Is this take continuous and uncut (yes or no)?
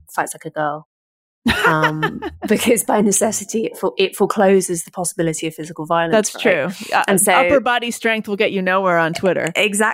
yes